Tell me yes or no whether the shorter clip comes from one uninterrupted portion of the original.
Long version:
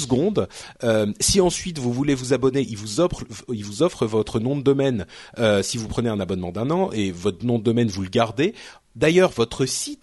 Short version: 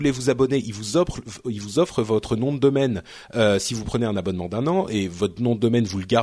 yes